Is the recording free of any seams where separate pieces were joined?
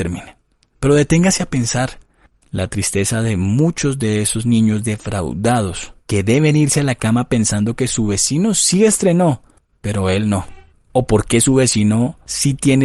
yes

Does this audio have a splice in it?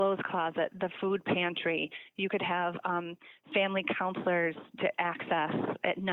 no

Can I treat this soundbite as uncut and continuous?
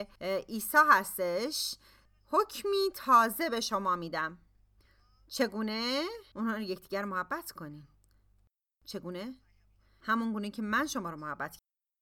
yes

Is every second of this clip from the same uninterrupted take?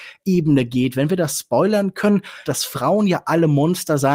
no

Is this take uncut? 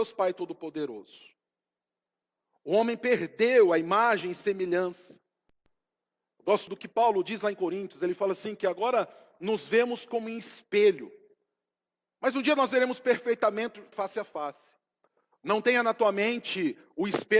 no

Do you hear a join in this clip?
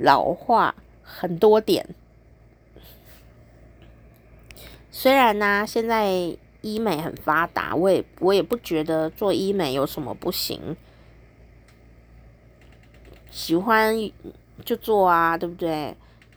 no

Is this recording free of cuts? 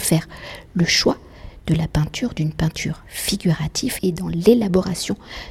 yes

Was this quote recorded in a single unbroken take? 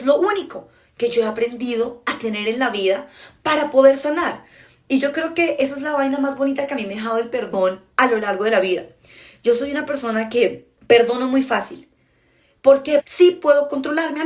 no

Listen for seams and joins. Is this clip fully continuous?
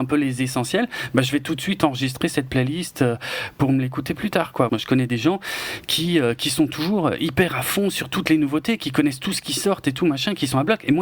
no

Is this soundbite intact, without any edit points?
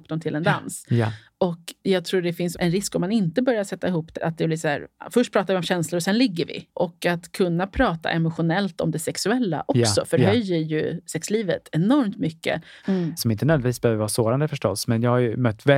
no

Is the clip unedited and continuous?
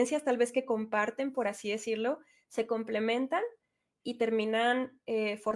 yes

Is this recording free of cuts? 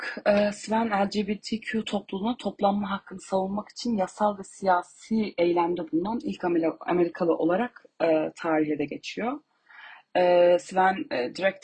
yes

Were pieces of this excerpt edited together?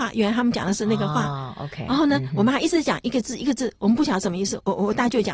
no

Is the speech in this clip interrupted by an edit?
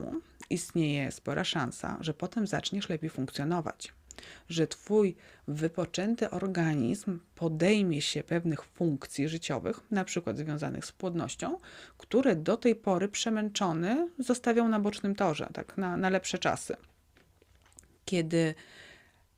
no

